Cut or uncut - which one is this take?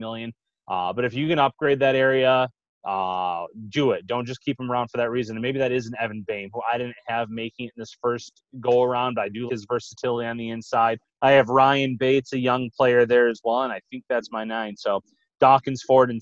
cut